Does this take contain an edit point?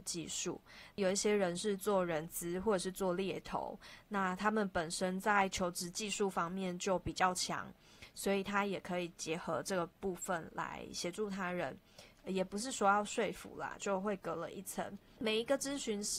yes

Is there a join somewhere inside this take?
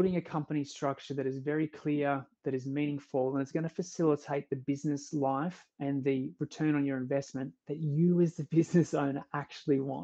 no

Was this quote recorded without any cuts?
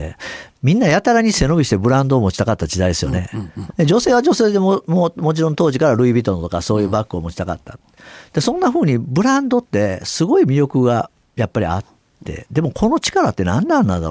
no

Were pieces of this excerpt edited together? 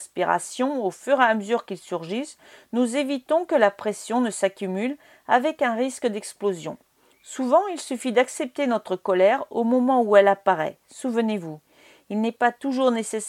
no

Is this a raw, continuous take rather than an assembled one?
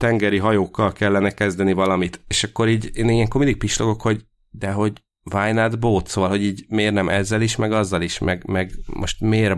yes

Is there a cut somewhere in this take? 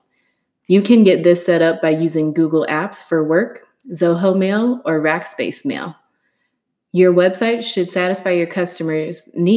no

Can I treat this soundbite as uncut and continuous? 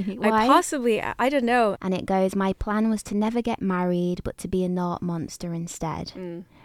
no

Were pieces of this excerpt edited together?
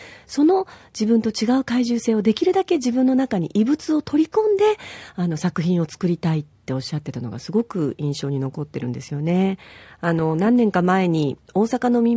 no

